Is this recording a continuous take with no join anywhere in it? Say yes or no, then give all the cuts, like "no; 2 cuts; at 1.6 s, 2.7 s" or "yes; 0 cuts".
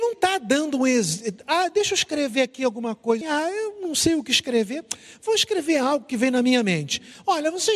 no; 1 cut; at 3.2 s